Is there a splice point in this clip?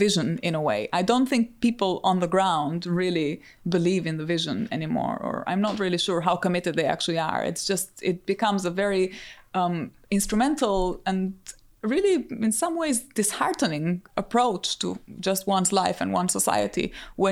no; 0 cuts

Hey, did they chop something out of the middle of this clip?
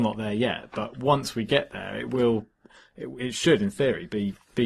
no; 0 cuts

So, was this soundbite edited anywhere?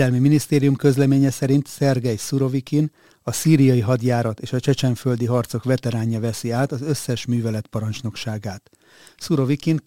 no; 0 cuts

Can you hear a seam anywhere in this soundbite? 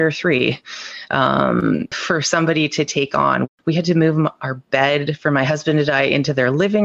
yes; 2 cuts; at 1.9 s, 3.5 s

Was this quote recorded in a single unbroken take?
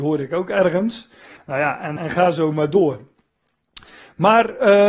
no; 1 cut; at 2.0 s

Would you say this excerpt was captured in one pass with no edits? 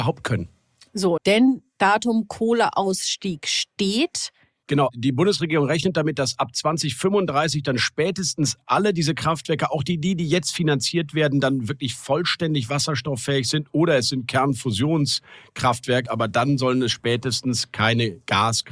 no; 3 cuts; at 1.2 s, 4.6 s, 16.1 s

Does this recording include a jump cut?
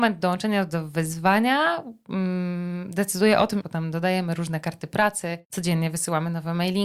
yes; 2 cuts; at 3.6 s, 5.4 s

